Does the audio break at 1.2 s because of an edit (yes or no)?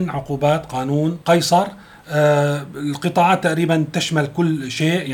yes